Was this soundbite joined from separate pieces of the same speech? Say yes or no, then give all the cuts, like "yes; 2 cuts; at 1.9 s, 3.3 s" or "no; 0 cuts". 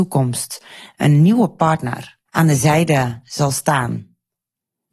yes; 1 cut; at 2.3 s